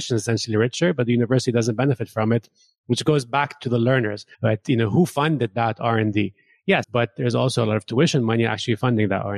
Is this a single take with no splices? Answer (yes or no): no